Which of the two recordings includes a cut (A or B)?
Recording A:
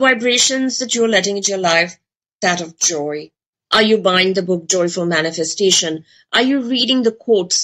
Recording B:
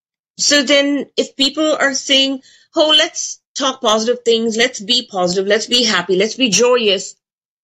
A